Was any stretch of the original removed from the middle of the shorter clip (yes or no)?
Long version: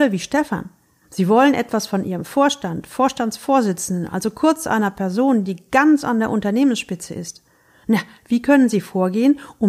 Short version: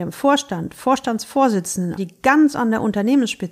yes